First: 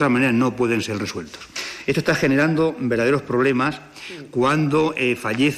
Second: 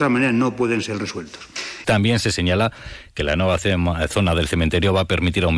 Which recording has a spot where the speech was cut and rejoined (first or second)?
second